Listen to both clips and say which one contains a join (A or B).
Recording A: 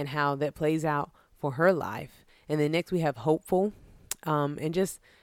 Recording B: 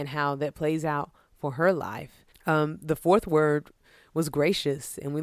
B